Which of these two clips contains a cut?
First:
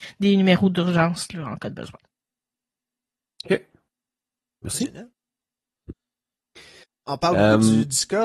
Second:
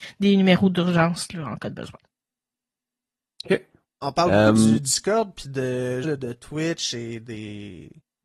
second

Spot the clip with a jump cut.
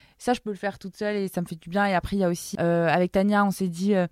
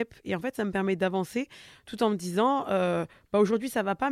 first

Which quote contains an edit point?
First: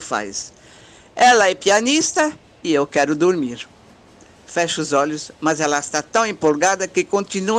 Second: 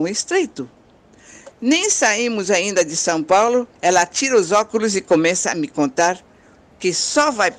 second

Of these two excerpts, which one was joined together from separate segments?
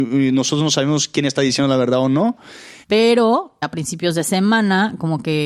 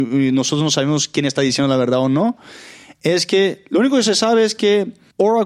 first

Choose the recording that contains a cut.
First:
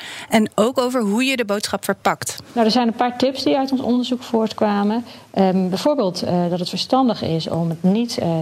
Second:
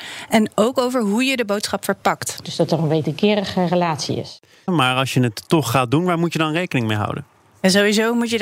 second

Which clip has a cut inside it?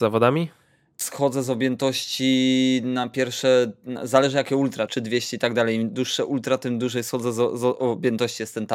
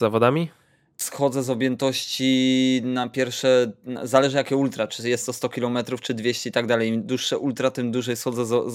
first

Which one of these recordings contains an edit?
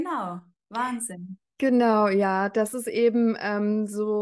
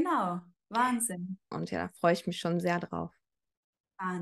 second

